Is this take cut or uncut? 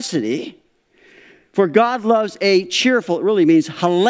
uncut